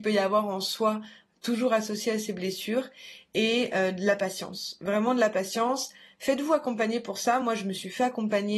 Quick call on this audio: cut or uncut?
uncut